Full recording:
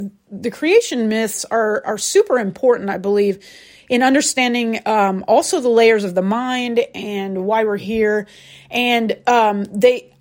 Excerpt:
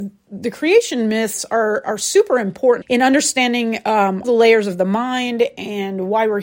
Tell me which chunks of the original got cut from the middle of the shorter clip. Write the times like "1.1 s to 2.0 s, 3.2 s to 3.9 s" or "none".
2.8 s to 3.8 s, 5.2 s to 5.6 s